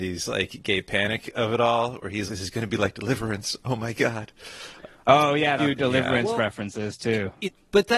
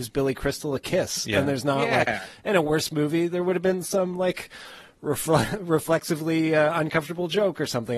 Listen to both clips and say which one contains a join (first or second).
first